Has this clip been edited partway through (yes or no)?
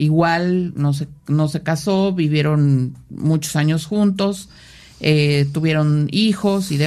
no